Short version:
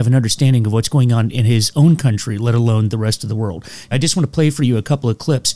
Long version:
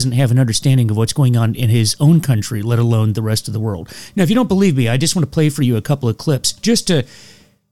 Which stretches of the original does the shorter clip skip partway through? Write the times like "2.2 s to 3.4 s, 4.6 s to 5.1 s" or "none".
4.2 s to 4.9 s